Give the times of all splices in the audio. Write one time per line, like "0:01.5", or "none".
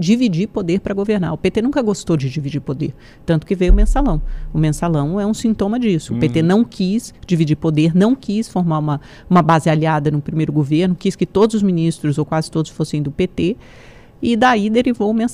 none